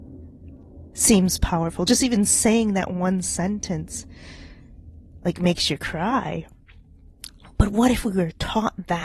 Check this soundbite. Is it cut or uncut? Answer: uncut